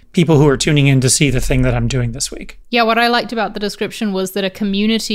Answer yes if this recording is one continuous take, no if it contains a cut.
no